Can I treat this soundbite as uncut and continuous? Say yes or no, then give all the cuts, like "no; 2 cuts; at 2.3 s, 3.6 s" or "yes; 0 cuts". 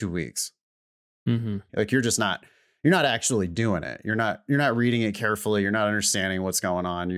no; 1 cut; at 1.7 s